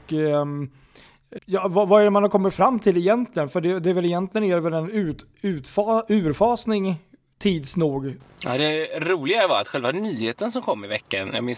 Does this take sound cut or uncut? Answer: cut